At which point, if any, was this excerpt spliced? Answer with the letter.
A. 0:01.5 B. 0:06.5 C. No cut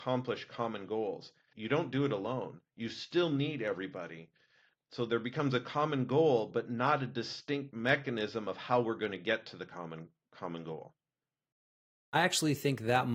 A